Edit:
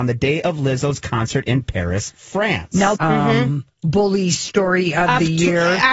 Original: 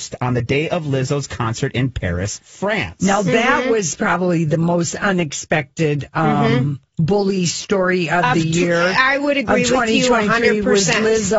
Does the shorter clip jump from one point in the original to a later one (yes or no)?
yes